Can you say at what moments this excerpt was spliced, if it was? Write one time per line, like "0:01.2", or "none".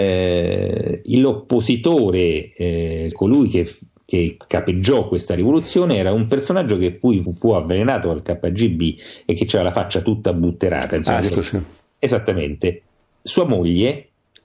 0:03.1
0:07.3
0:11.3